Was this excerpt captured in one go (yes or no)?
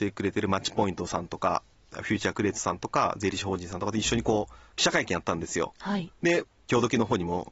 yes